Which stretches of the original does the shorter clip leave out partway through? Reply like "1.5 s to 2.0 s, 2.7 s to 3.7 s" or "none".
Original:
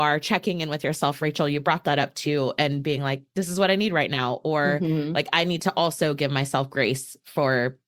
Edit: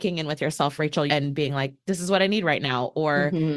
1.5 s to 2.6 s